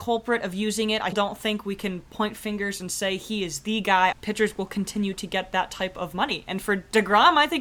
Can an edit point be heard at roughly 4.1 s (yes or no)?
yes